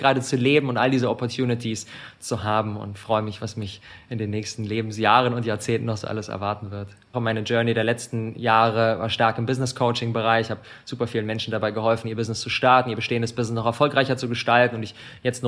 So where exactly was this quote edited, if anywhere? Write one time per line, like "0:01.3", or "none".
0:07.1

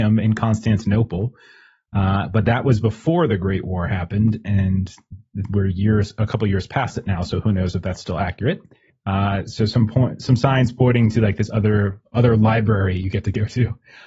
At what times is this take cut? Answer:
0:08.9

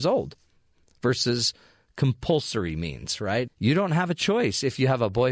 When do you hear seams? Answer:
0:03.5

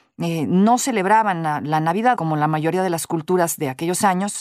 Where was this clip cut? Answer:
0:02.1

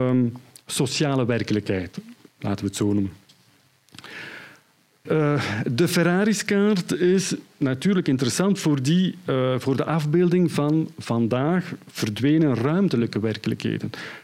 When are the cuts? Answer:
0:05.1

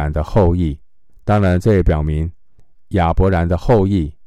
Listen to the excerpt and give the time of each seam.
0:01.1

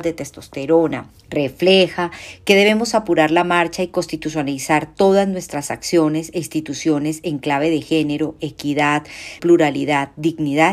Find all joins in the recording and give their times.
0:01.2
0:09.4

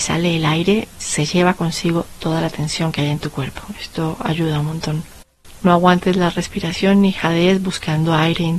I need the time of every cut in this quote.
none

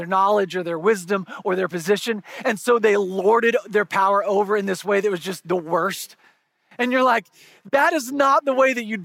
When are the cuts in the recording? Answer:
none

